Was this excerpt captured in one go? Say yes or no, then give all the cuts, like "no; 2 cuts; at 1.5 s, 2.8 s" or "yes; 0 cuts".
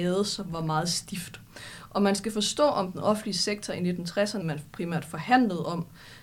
no; 1 cut; at 4.4 s